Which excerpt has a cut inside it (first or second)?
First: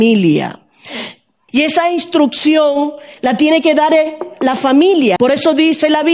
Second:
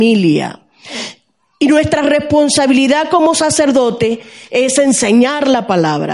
first